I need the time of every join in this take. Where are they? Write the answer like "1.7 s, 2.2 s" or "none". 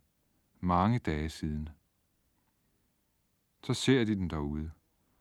none